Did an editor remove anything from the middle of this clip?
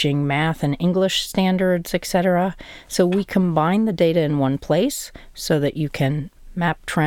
no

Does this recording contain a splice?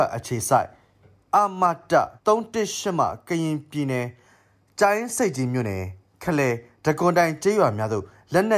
yes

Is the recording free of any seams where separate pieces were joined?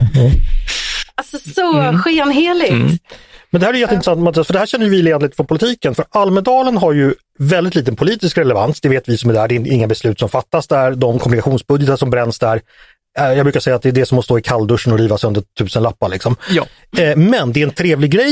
yes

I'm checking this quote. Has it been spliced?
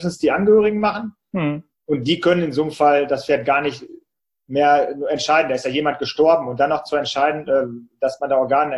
no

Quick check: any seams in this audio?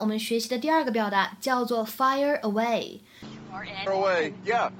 yes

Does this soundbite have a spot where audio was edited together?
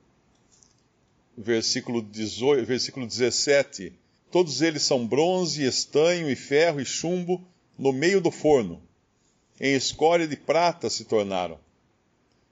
yes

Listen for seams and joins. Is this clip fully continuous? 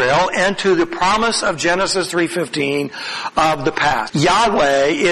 no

